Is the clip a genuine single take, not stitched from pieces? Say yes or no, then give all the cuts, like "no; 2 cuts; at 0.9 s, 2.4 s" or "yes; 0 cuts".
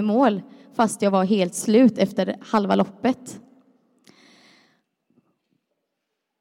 yes; 0 cuts